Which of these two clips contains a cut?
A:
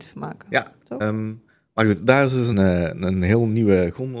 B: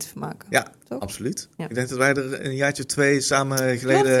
A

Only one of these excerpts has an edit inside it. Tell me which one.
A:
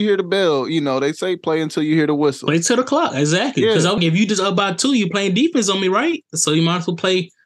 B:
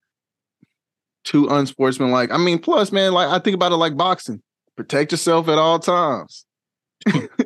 A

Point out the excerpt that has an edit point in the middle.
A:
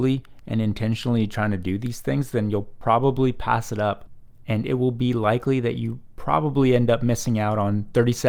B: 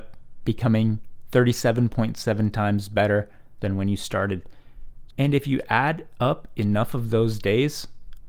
B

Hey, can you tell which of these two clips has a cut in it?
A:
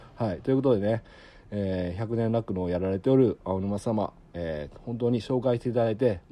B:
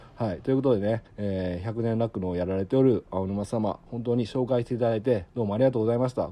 B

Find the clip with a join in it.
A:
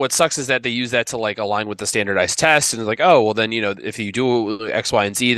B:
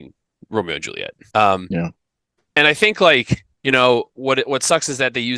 B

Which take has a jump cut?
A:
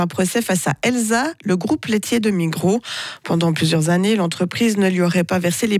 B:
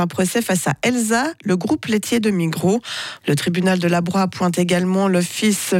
B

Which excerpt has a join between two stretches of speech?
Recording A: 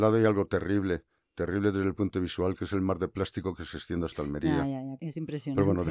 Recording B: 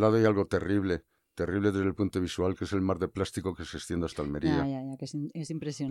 A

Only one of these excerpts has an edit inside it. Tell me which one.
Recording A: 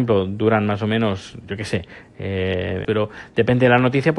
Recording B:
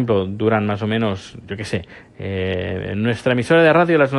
A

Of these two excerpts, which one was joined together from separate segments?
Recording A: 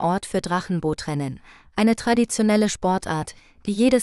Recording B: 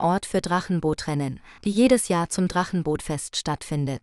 B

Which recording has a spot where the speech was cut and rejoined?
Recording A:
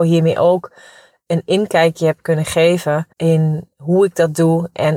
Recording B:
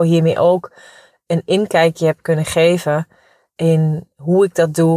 A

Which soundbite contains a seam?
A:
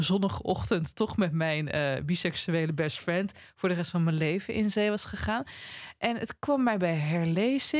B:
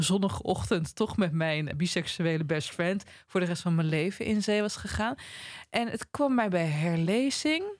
B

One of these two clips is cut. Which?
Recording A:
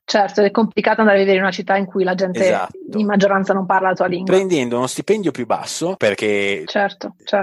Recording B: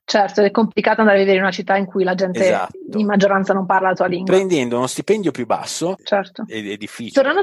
B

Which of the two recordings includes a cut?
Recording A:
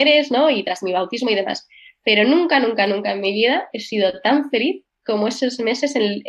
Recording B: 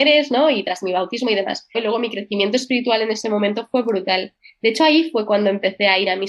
B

